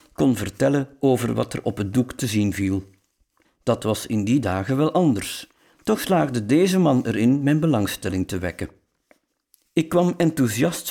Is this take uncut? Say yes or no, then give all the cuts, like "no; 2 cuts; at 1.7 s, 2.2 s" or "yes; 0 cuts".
no; 1 cut; at 3.4 s